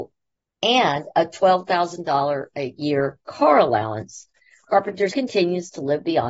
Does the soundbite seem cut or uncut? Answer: cut